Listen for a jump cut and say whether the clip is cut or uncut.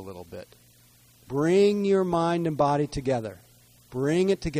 cut